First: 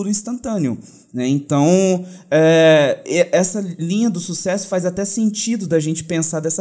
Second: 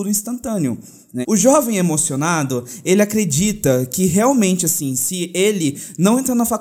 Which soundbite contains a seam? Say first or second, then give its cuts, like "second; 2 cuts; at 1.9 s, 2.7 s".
second; 1 cut; at 1.2 s